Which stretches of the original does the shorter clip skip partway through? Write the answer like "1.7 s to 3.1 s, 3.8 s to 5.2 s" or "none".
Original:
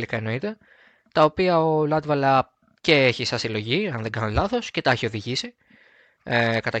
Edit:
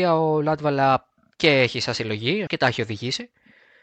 3.9 s to 4.7 s

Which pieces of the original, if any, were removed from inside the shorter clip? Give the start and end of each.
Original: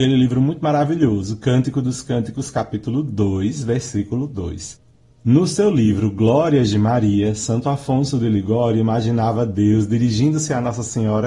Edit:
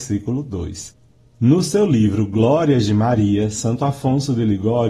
none

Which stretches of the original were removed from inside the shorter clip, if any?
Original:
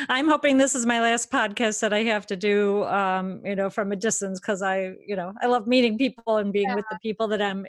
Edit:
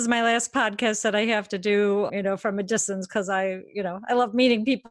2.9 s to 3.4 s

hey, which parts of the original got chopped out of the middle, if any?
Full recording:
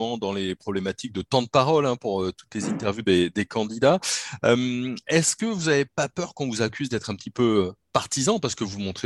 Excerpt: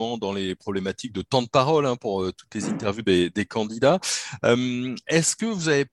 none

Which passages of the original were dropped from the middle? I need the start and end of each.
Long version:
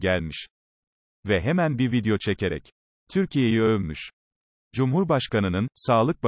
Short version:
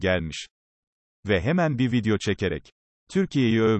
none

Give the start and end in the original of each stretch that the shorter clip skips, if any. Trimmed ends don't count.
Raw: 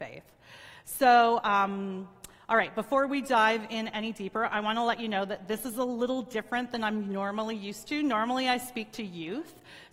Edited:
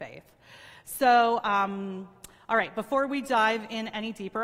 none

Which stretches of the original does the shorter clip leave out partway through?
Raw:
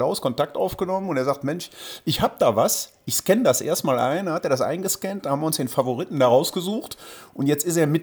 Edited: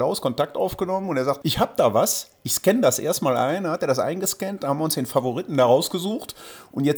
1.4 s to 2.0 s

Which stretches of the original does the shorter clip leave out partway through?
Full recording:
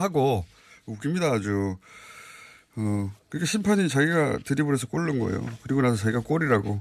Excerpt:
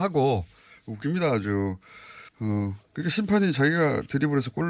2.3 s to 2.6 s

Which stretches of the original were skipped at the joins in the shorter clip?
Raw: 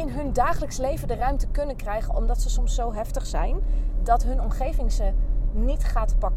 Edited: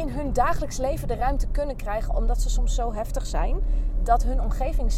none

